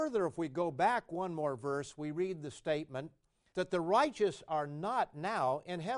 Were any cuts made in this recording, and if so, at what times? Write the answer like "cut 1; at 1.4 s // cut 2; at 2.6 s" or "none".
cut 1; at 3.5 s